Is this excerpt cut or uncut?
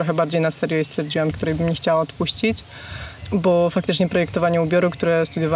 cut